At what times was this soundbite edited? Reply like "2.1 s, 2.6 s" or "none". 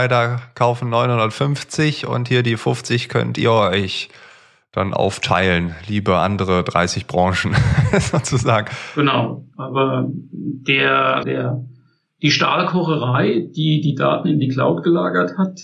9.5 s, 11.2 s